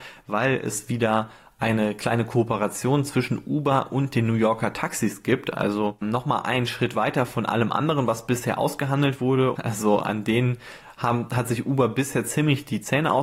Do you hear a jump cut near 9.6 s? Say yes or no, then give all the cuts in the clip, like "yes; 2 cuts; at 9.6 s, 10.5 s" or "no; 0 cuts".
yes; 2 cuts; at 6.0 s, 9.6 s